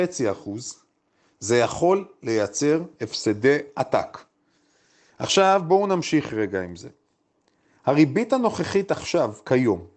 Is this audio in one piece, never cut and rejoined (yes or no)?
yes